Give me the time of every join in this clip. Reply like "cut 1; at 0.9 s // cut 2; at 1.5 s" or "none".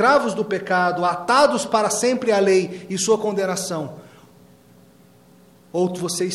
none